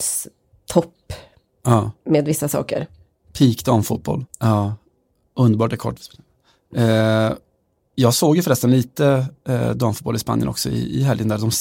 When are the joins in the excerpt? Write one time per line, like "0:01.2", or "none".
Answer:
0:04.3